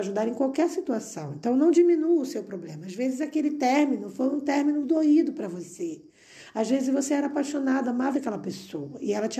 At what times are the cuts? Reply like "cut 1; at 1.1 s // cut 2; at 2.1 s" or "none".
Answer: cut 1; at 4.8 s // cut 2; at 8.1 s